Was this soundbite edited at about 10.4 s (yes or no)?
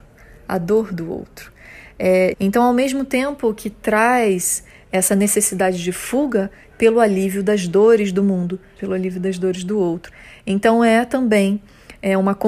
no